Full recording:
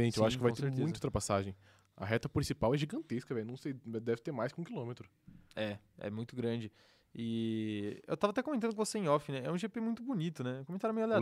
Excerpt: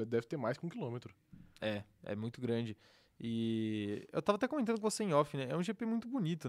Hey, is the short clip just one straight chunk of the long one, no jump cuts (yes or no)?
yes